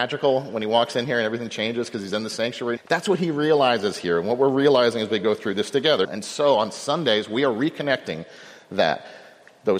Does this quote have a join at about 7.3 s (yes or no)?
no